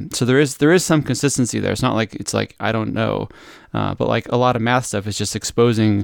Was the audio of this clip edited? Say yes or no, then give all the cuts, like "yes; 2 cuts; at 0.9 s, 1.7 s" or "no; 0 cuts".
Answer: no; 0 cuts